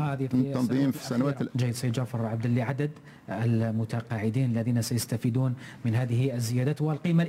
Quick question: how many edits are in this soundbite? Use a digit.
1